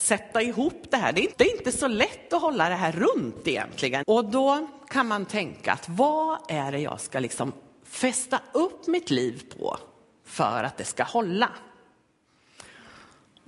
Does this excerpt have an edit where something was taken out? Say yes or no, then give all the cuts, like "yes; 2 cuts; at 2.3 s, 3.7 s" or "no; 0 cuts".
yes; 2 cuts; at 1.3 s, 4.0 s